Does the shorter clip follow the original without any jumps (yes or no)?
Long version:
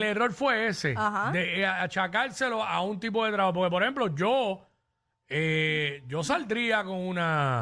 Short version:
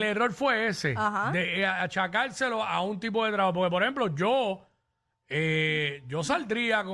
yes